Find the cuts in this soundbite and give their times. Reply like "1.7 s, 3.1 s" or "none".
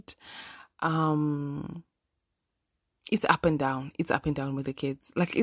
none